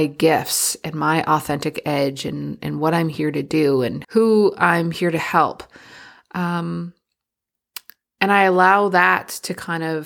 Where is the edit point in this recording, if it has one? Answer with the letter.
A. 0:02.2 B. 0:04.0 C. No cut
B